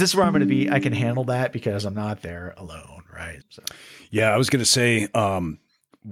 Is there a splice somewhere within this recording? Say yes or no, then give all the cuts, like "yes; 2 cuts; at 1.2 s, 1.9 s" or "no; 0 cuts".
yes; 1 cut; at 3.4 s